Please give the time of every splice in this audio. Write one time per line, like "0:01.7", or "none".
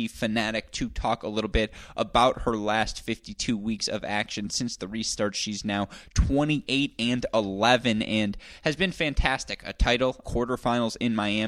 0:10.2